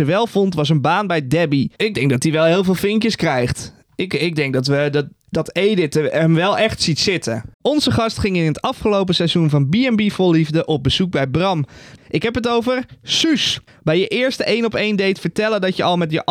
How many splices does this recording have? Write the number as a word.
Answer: three